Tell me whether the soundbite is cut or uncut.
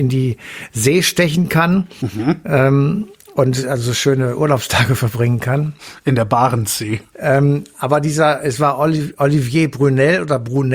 cut